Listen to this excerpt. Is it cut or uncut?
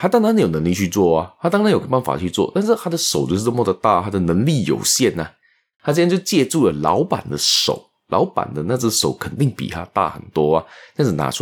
cut